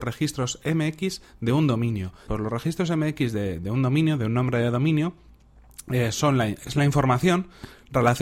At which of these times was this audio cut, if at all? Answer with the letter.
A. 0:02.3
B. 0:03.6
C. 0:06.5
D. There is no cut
A